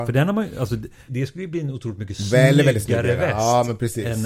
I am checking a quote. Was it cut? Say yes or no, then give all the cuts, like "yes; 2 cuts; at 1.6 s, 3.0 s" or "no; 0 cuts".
yes; 1 cut; at 1.1 s